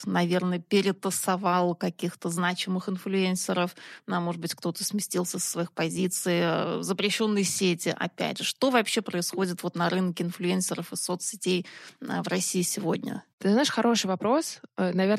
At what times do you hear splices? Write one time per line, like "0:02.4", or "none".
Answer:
0:13.3